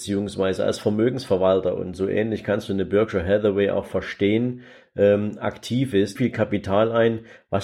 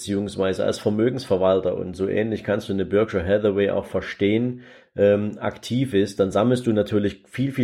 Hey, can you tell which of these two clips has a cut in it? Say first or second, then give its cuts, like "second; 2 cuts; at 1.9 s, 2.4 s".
first; 1 cut; at 6.2 s